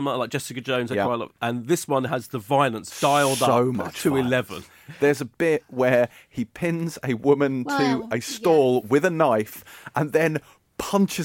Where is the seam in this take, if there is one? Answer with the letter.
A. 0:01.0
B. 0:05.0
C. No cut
C